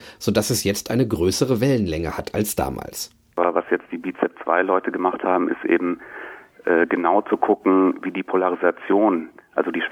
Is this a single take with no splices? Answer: no; 1 cut; at 3.3 s

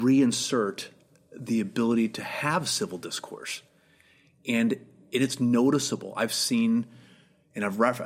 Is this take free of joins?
yes; 0 cuts

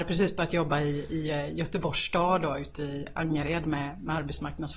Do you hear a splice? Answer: no; 0 cuts

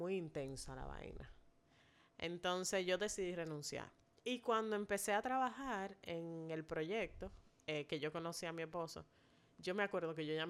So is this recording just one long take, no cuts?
yes; 0 cuts

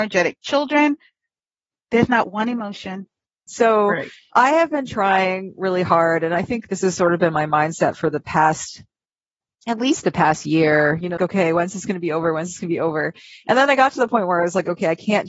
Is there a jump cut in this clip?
yes; 2 cuts; at 3.5 s, 11.2 s

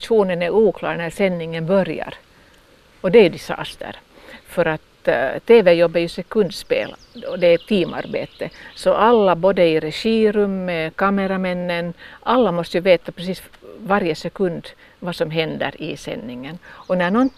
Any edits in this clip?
no; 0 cuts

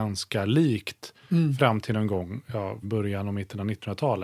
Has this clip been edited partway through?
yes; 1 cut; at 2.8 s

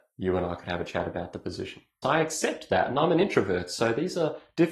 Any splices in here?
yes; 1 cut; at 2.0 s

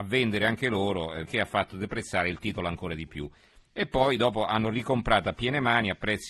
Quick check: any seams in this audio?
yes; 2 cuts; at 1.3 s, 5.3 s

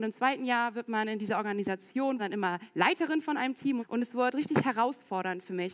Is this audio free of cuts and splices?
no; 2 cuts; at 2.2 s, 3.8 s

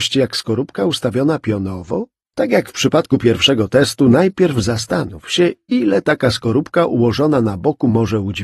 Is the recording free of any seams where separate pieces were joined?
no; 1 cut; at 2.3 s

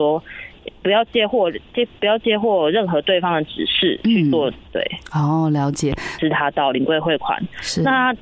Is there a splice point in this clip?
yes; 2 cuts; at 4.6 s, 6.2 s

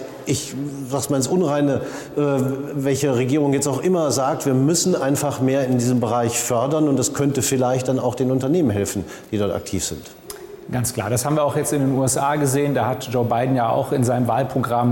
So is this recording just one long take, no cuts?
yes; 0 cuts

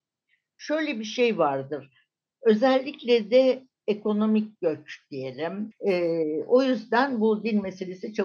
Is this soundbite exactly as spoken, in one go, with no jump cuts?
no; 1 cut; at 5.7 s

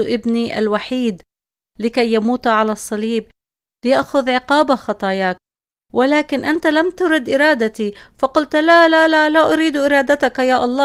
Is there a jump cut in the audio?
no; 0 cuts

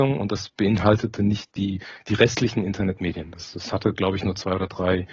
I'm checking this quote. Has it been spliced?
no; 0 cuts

